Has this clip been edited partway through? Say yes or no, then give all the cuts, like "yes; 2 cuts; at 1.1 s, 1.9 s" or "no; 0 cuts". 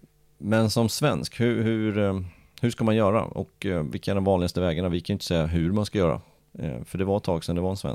no; 0 cuts